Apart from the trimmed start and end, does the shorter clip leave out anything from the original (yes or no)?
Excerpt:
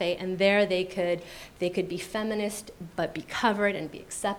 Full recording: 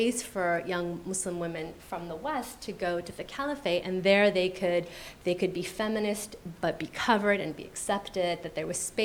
no